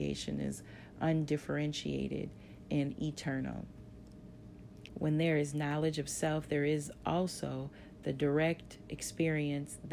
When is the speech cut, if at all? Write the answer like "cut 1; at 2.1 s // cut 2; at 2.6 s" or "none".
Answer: cut 1; at 2.6 s // cut 2; at 4.9 s